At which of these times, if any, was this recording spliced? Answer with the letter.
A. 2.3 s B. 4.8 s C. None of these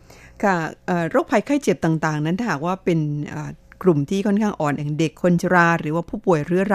B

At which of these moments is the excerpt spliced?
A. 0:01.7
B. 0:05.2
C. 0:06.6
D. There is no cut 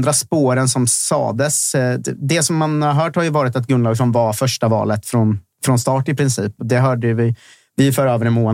C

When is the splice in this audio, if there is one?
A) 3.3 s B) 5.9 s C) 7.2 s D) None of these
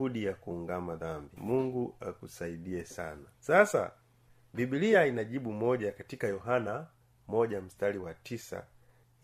A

